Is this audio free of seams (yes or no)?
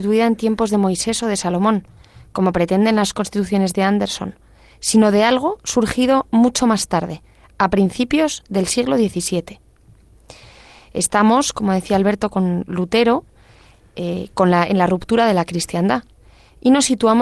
yes